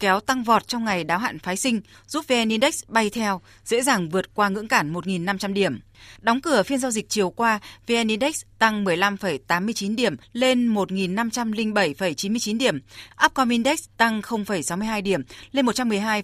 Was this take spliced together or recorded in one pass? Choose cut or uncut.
cut